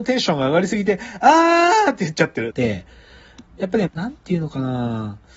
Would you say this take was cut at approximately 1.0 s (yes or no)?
no